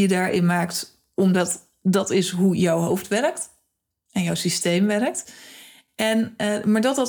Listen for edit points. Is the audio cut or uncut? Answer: uncut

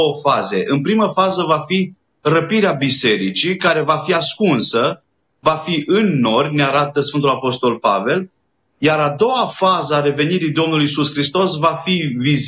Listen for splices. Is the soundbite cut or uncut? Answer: uncut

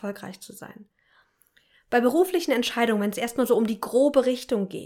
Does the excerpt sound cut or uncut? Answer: uncut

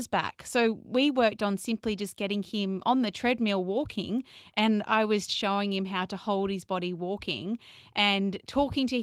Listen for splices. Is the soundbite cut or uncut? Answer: cut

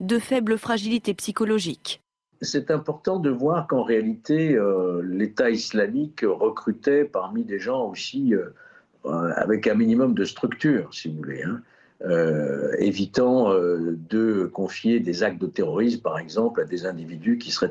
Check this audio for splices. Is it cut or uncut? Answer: uncut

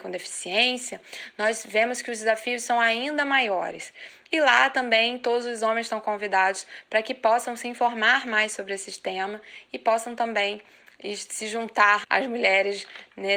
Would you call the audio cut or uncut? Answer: cut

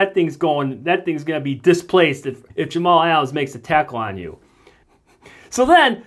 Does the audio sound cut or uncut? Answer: cut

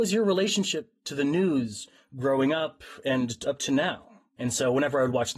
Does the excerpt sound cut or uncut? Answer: cut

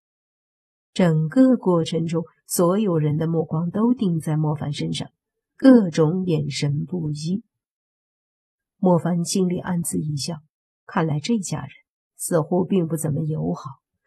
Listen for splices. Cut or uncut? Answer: uncut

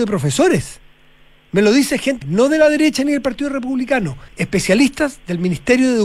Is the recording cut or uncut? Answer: cut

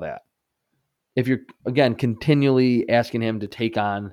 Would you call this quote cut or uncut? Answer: cut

